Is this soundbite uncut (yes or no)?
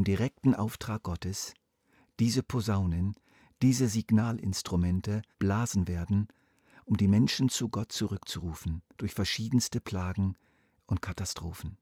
no